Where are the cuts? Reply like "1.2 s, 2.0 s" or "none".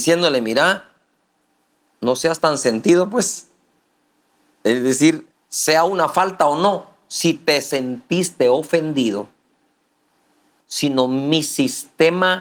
5.3 s, 10.6 s